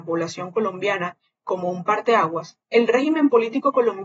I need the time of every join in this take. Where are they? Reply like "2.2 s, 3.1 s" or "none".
2.6 s